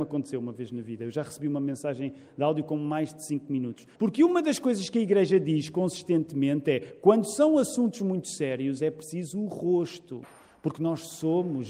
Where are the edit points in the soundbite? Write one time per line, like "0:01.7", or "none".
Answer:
0:03.9

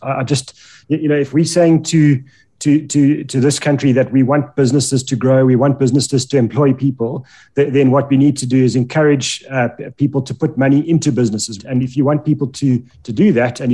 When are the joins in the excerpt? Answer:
0:11.6

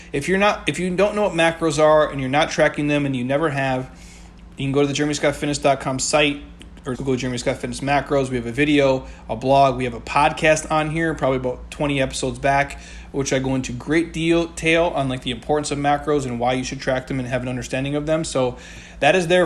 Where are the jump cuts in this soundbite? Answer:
0:06.9

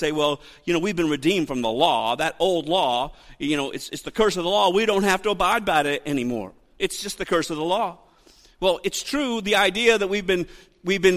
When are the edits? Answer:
none

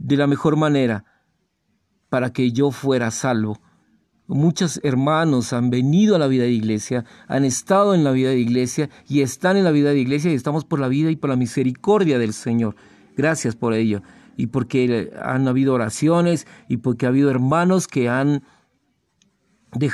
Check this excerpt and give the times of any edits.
none

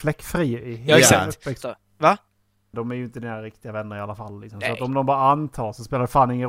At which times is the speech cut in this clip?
0:01.6
0:02.7

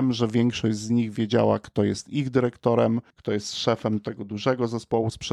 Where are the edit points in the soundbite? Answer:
0:03.1

